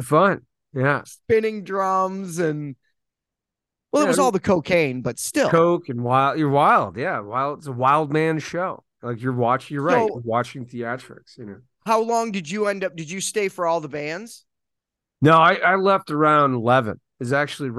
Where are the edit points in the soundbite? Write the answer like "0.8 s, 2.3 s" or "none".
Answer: none